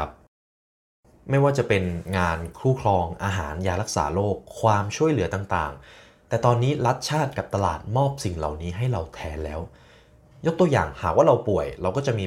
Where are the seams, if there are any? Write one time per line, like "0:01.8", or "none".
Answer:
none